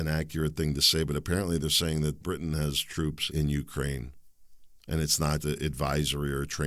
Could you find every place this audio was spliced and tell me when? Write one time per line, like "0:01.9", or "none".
0:02.2
0:03.3
0:05.4